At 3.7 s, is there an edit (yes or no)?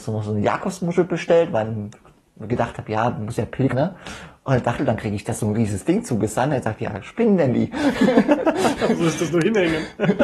yes